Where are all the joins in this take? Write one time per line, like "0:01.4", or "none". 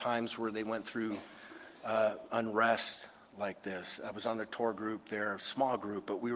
none

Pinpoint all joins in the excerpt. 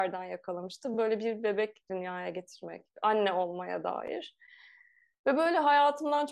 none

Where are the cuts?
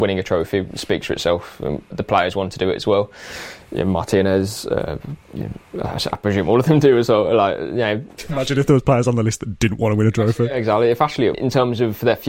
0:01.9
0:11.3

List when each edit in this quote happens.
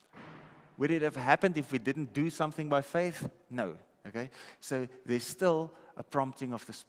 0:03.9

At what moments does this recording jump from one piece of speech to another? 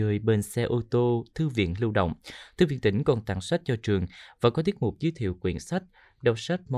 none

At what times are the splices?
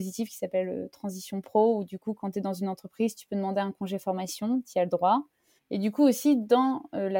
0:05.6

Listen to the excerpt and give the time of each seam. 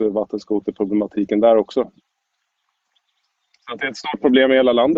none

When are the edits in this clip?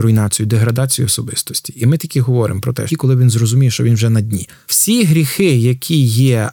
0:02.9
0:04.7

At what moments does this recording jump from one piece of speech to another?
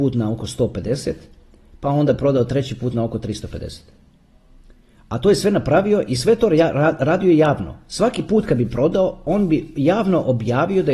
none

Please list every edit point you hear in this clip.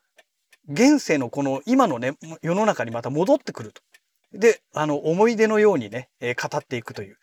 0:04.2

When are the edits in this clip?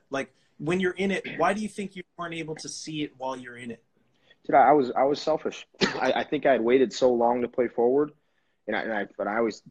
none

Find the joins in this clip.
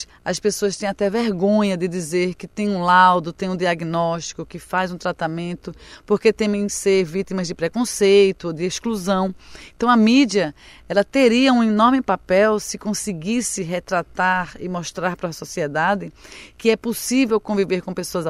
none

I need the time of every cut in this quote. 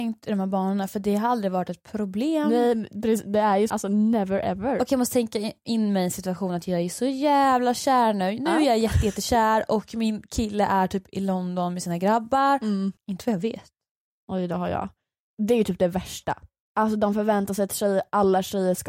0:03.7
0:13.0

